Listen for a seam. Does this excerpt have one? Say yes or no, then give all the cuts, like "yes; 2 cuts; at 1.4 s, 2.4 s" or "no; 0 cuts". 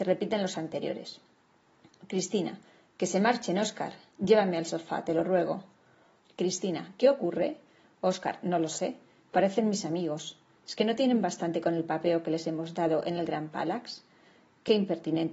yes; 2 cuts; at 6.2 s, 10.6 s